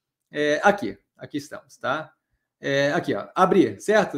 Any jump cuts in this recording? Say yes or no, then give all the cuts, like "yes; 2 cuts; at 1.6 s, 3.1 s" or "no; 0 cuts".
no; 0 cuts